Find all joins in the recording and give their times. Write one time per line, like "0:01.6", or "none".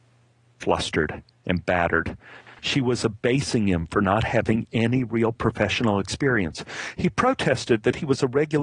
0:02.6